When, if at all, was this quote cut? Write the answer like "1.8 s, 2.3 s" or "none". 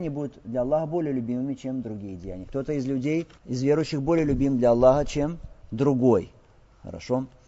3.3 s